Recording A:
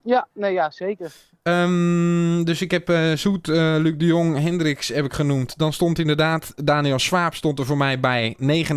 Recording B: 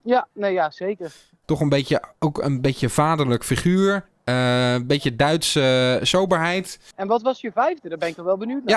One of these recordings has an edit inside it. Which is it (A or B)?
B